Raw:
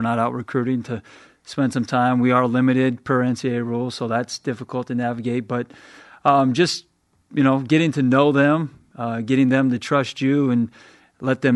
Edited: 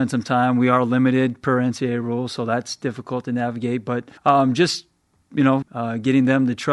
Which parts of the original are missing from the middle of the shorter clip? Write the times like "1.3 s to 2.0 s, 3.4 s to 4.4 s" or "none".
5.8 s to 6.2 s, 7.6 s to 8.9 s

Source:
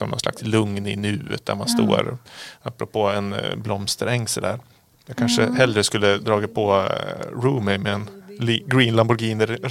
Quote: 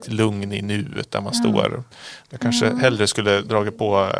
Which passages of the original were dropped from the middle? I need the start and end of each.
2.6 s to 5.0 s

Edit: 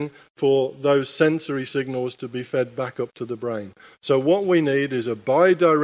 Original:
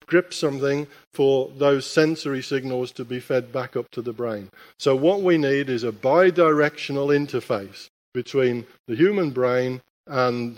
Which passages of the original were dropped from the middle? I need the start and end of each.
none

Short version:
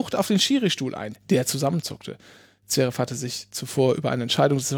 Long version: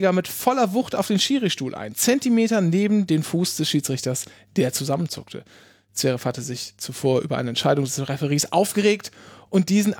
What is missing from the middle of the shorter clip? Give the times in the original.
1.9 s to 4.4 s

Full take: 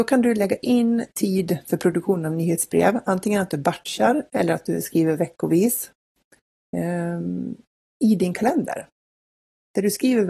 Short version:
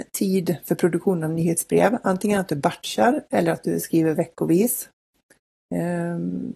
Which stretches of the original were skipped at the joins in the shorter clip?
none

